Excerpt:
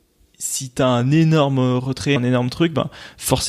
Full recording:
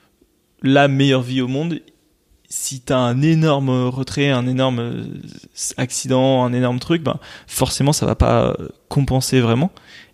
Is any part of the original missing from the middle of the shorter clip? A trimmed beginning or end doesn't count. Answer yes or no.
yes